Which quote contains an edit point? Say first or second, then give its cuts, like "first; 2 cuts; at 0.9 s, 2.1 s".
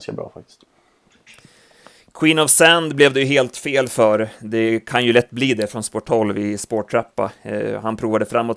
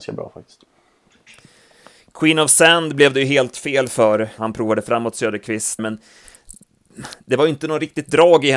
second; 2 cuts; at 4.4 s, 5.8 s